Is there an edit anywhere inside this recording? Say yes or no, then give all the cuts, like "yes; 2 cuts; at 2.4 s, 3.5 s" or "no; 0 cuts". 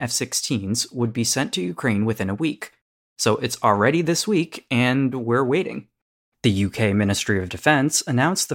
no; 0 cuts